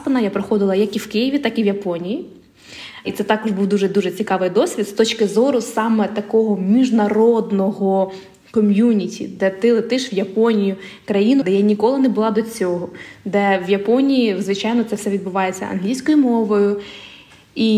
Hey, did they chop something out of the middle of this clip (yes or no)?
yes